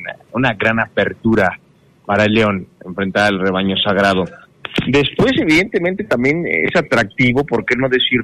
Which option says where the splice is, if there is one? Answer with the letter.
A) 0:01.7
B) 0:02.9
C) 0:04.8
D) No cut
D